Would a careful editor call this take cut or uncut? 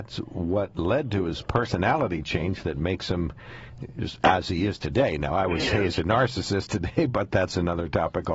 uncut